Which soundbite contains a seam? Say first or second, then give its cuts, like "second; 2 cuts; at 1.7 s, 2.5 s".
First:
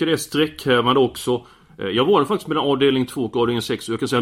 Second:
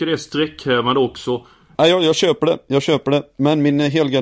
second; 1 cut; at 1.7 s